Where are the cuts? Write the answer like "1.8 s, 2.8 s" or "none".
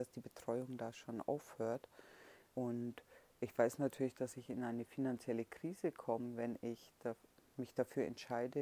2.5 s